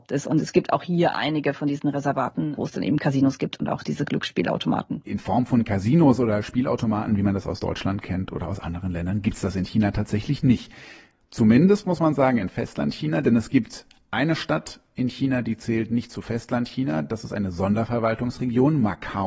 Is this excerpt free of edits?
yes; 0 cuts

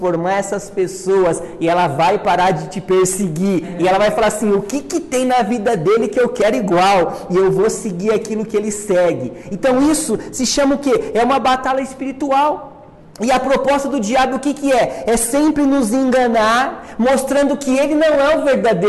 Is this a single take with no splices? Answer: yes; 0 cuts

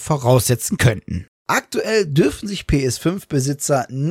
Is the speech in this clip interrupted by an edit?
yes; 1 cut; at 1.3 s

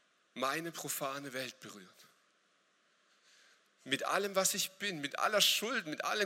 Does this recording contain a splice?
no; 0 cuts

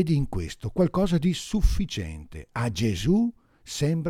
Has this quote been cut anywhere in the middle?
no; 0 cuts

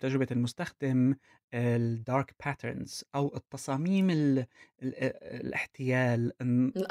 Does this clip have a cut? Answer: no; 0 cuts

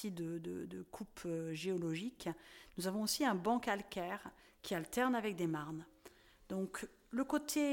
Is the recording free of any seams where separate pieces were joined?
yes; 0 cuts

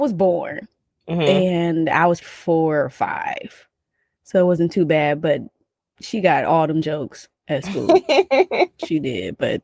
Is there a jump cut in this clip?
yes; 1 cut; at 2.2 s

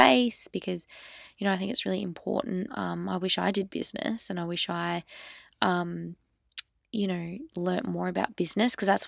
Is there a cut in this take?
yes; 1 cut; at 2.7 s

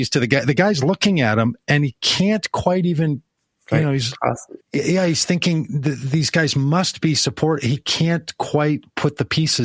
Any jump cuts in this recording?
yes; 1 cut; at 4.6 s

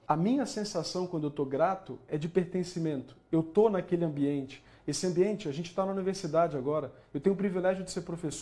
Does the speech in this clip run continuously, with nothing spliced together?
yes; 0 cuts

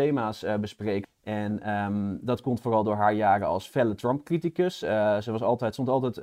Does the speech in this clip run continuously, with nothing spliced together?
no; 1 cut; at 1.0 s

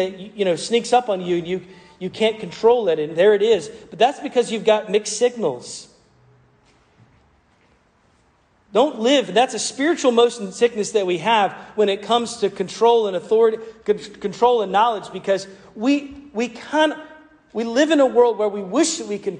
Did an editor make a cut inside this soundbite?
no; 0 cuts

